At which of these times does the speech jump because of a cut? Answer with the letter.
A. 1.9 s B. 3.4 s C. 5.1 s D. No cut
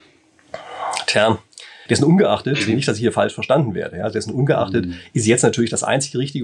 A